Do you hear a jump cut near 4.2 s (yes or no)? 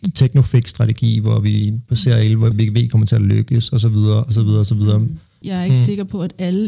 no